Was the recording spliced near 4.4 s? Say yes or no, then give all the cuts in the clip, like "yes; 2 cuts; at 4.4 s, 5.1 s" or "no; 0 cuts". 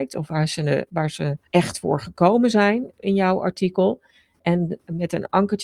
no; 1 cut; at 1.5 s